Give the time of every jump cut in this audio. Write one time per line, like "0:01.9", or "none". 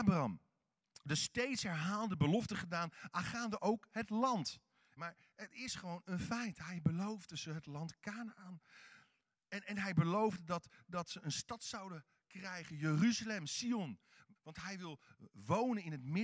0:05.0
0:14.4